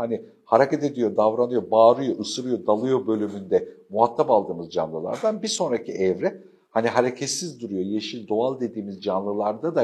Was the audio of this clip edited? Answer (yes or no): no